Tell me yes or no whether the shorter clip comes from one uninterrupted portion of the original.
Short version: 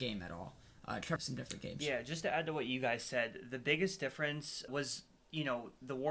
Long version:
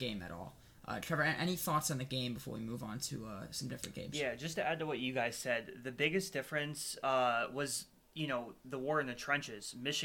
no